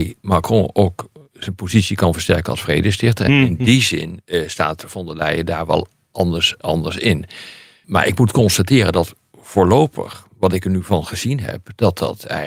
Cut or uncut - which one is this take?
uncut